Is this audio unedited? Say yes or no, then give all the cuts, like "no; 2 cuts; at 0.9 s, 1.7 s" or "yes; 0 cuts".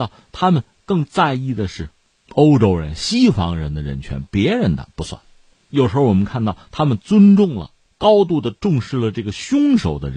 yes; 0 cuts